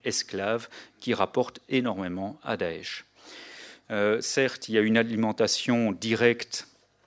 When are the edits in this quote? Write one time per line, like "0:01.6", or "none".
0:03.8